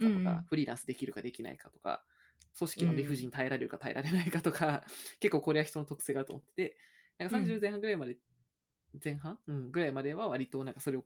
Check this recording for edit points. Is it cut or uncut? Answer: uncut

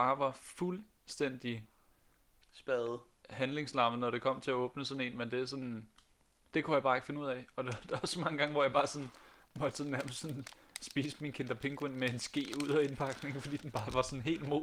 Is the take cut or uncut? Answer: uncut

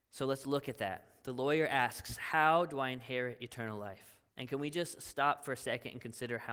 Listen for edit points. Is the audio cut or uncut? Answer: cut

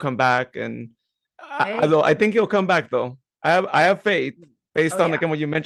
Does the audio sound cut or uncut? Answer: uncut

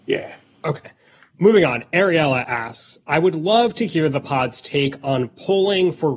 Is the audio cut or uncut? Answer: uncut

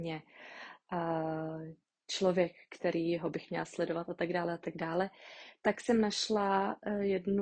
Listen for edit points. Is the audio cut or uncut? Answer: uncut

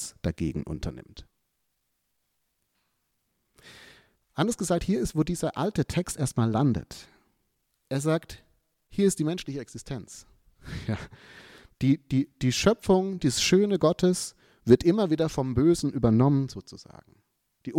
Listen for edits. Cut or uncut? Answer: uncut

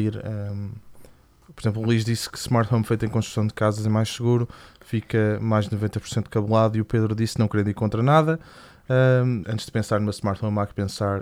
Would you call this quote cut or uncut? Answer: cut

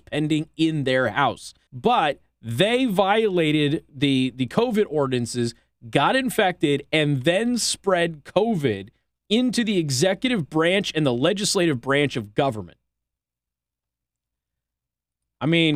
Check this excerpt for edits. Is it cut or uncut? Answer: cut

